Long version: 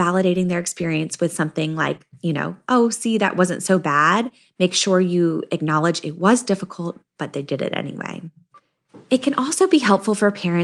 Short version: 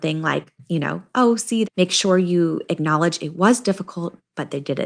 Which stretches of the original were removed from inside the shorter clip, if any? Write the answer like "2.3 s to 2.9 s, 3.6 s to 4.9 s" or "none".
3.2 s to 4.5 s